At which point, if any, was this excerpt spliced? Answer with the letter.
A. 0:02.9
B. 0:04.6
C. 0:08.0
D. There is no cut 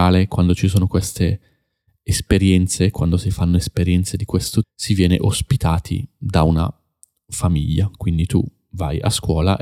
B